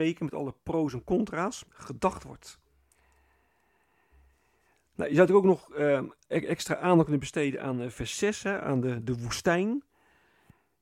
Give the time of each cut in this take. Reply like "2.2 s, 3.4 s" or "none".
1.6 s, 6.3 s